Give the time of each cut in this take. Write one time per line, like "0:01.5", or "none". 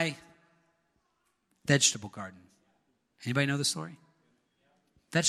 none

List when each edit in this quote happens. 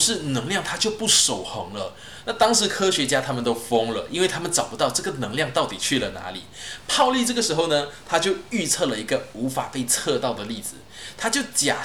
none

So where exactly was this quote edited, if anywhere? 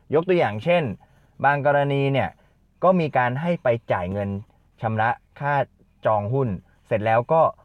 none

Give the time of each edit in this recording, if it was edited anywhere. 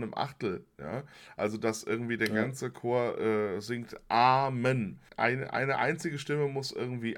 none

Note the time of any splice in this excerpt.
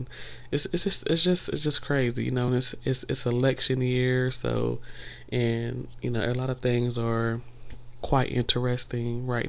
none

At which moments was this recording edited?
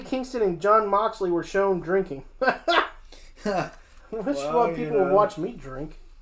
none

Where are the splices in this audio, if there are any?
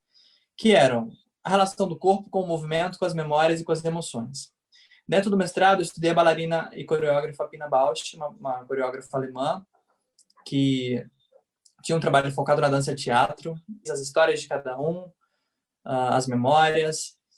0:13.8

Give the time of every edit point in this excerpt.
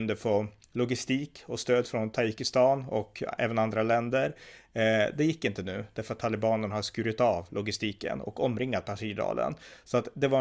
none

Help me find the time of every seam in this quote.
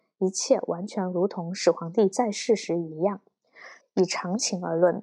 0:03.8

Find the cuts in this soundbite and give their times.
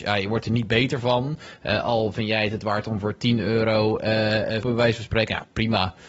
0:04.6

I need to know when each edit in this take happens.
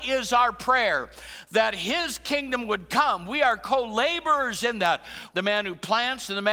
0:05.3

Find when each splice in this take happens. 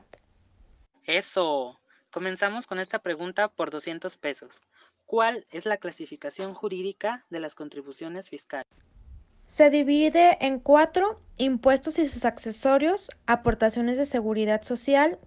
none

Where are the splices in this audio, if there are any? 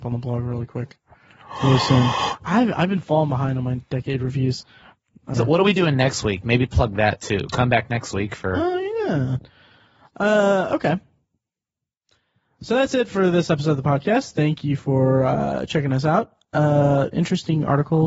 0:05.3
0:17.1

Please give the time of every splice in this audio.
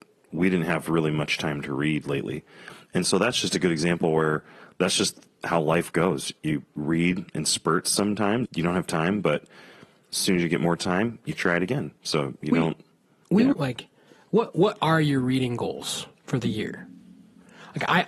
0:08.5
0:13.5

